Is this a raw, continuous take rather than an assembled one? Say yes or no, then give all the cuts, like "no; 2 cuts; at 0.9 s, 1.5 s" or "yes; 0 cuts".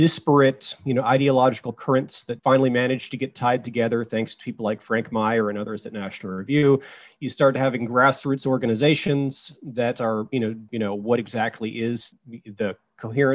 no; 2 cuts; at 10.7 s, 12.1 s